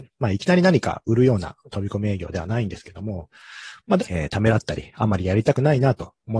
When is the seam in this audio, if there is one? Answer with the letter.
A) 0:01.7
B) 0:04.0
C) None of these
B